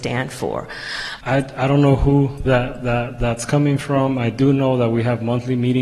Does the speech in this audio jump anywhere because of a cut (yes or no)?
yes